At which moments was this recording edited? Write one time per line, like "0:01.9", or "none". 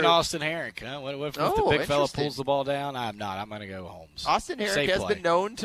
none